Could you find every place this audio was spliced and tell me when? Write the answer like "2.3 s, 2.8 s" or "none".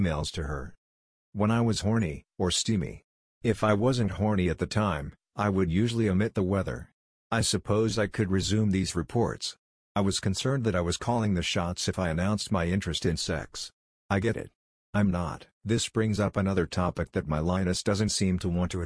2.3 s, 15.5 s